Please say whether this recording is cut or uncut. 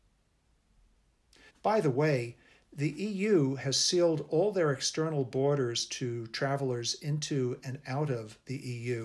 cut